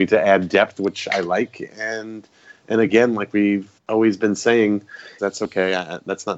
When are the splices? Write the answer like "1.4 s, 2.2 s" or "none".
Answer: 3.8 s, 5.2 s